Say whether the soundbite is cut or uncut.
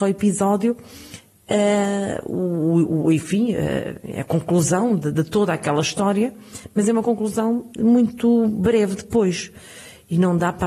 uncut